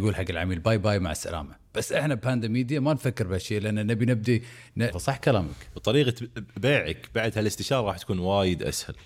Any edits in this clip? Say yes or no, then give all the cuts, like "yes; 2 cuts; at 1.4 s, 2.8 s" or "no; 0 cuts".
yes; 1 cut; at 4.9 s